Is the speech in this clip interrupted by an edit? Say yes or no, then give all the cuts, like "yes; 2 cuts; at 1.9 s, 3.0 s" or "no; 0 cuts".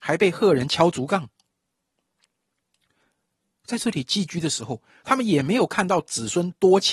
no; 0 cuts